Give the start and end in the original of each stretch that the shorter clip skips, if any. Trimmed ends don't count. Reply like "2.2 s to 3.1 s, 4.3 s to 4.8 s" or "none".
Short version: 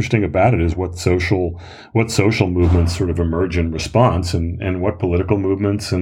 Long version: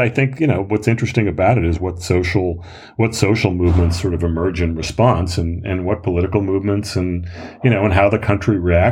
none